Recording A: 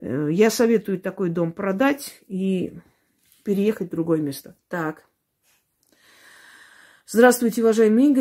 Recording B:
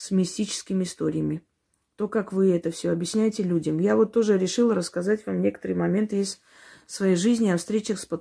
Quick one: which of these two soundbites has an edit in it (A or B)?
A